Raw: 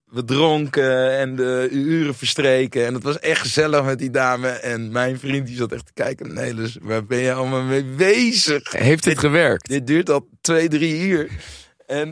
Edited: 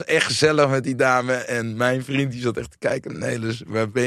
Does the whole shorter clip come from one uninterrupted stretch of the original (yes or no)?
yes